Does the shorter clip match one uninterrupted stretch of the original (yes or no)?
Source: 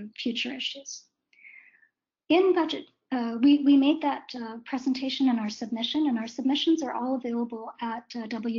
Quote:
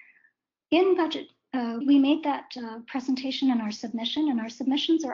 no